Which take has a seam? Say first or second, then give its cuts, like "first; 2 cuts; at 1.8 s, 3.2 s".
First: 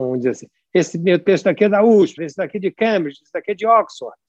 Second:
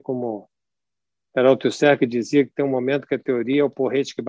first; 1 cut; at 2.2 s